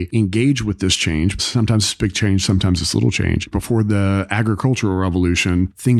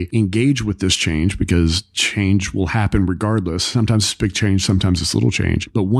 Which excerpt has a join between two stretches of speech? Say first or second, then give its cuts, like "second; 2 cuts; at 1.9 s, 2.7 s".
first; 2 cuts; at 1.4 s, 3.5 s